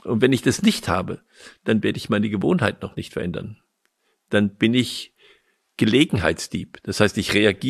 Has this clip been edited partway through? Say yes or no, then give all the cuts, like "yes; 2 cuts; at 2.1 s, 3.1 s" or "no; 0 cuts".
no; 0 cuts